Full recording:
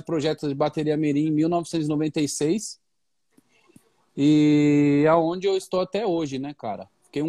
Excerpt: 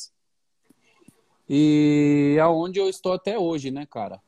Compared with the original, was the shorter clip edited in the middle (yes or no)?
no